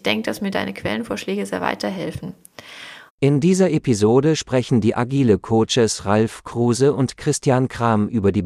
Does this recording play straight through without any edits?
no; 1 cut; at 3.1 s

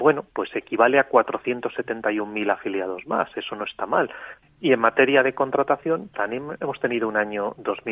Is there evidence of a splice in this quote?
yes; 2 cuts; at 4.4 s, 6.1 s

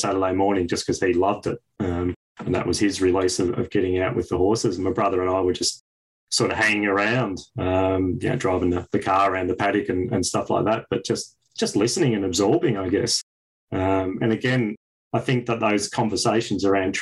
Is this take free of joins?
yes; 0 cuts

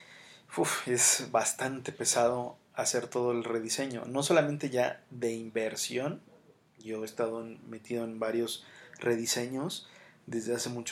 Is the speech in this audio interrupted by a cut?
no; 0 cuts

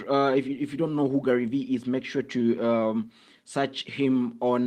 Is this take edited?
no; 0 cuts

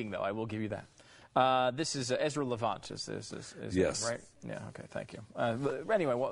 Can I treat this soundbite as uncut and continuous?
yes; 0 cuts

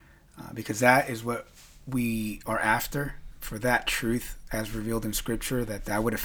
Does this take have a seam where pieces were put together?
no; 0 cuts

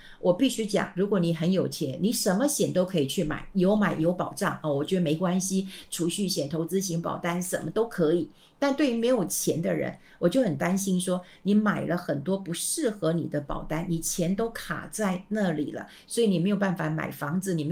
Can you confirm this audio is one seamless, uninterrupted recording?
yes; 0 cuts

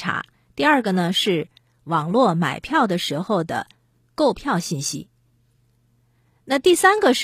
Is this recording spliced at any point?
no; 0 cuts

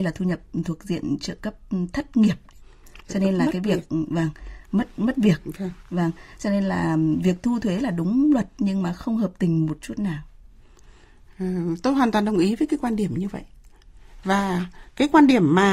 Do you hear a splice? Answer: no; 0 cuts

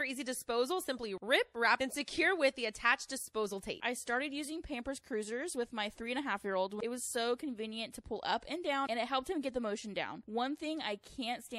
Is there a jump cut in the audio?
yes; 1 cut; at 1.8 s

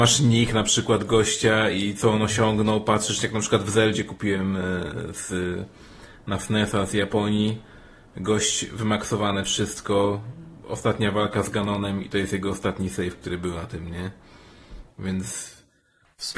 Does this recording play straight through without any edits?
yes; 0 cuts

